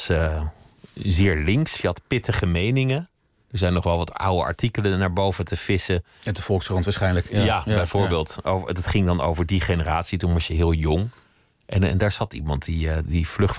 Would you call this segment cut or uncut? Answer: uncut